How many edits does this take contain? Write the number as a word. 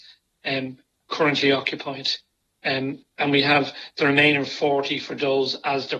zero